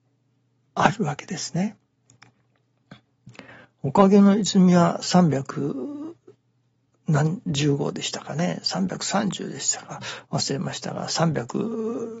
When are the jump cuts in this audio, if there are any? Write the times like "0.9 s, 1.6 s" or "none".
none